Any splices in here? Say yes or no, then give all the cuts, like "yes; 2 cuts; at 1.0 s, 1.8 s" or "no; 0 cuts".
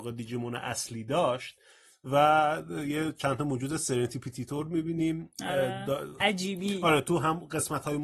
yes; 1 cut; at 6.2 s